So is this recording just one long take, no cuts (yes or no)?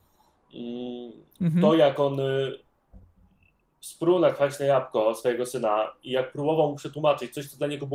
yes